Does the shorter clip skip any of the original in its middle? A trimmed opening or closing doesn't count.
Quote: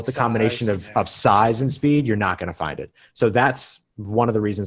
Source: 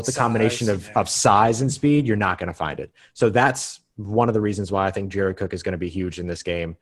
no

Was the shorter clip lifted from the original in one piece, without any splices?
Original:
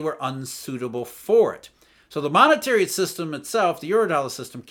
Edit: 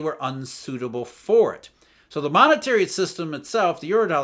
yes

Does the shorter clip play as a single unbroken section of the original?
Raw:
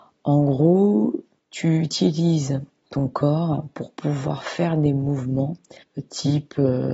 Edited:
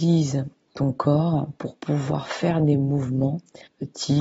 yes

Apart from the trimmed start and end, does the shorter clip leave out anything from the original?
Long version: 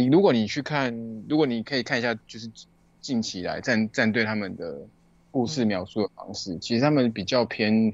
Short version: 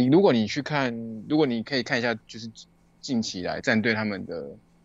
yes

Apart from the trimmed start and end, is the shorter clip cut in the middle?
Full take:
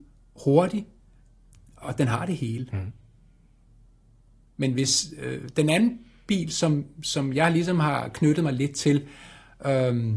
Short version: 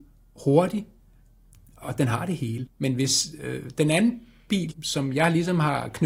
yes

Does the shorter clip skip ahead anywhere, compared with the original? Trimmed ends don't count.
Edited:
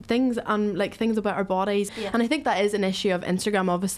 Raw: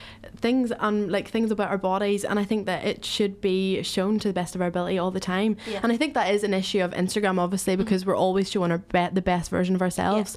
yes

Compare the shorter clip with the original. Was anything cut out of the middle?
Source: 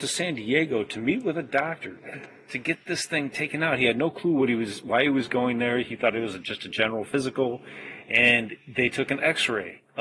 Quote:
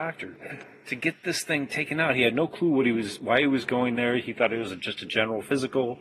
no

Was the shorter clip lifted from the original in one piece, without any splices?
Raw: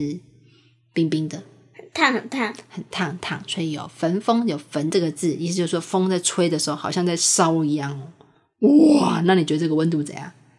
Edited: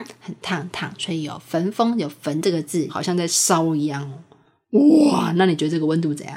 no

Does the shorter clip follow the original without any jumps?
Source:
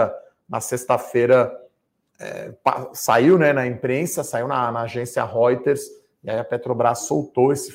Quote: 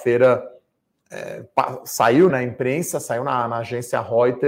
no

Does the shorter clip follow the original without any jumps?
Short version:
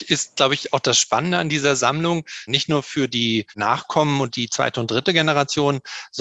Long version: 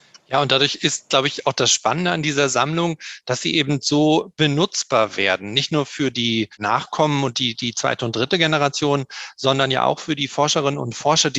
no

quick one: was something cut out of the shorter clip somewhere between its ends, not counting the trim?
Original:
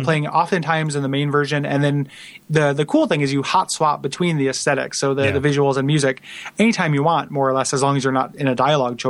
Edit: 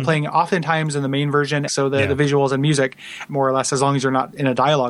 yes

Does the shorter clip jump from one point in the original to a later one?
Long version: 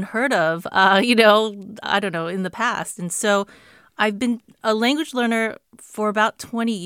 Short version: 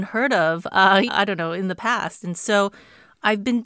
yes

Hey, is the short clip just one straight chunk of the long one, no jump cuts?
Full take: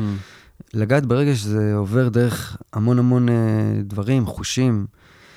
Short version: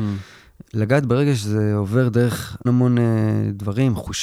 no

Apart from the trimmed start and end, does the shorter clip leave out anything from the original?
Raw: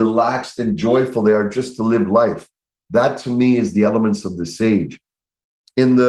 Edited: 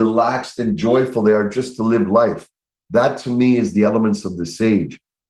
no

